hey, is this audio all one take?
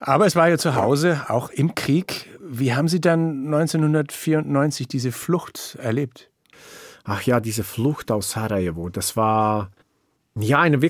yes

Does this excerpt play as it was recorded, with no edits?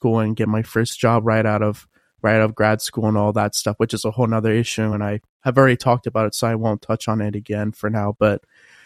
yes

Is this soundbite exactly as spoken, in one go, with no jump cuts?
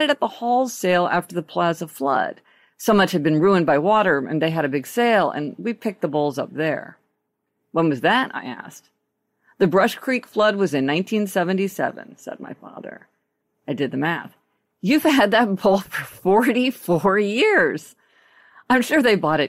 yes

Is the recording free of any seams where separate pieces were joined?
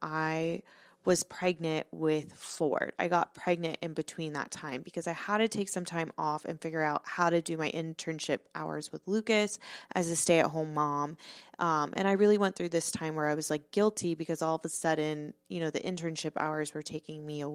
yes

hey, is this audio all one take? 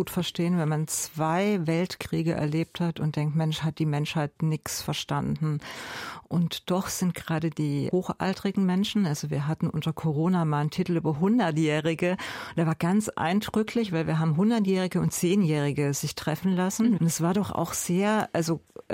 no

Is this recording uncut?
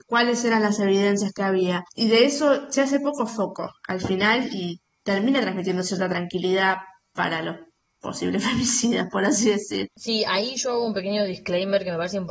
yes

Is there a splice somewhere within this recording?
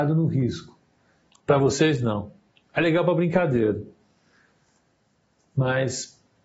yes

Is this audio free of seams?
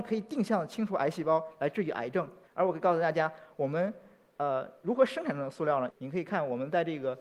no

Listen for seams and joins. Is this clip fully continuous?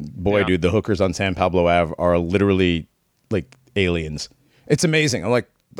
yes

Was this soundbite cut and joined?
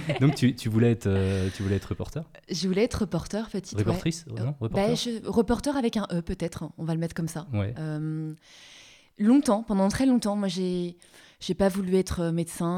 no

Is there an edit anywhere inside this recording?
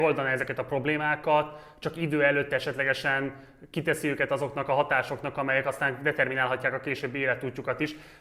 no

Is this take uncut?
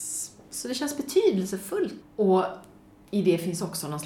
no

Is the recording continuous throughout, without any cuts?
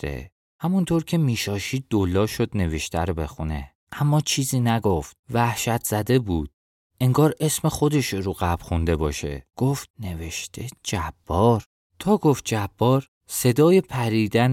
yes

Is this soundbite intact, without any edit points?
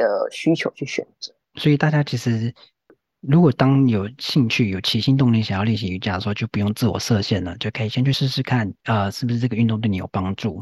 yes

